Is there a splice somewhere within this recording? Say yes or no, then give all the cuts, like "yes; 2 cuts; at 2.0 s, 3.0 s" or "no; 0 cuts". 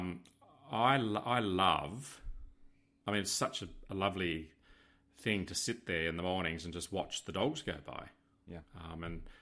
no; 0 cuts